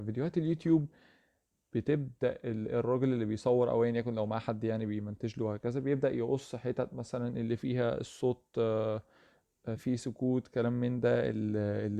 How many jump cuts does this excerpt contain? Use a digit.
1